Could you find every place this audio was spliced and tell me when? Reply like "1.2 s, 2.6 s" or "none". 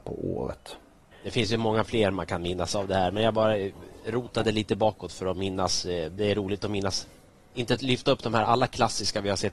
1.1 s